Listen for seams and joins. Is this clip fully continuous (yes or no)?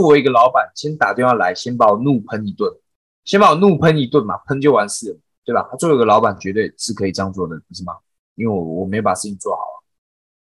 yes